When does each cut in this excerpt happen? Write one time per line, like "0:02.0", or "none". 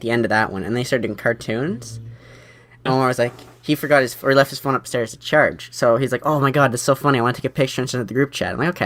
0:02.9